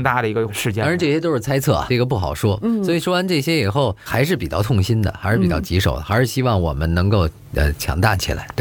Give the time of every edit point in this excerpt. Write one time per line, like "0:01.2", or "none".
none